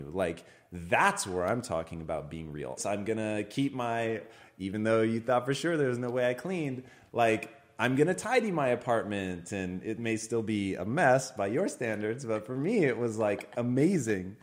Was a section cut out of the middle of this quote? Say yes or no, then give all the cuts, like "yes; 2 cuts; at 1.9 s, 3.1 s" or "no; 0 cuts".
yes; 1 cut; at 2.8 s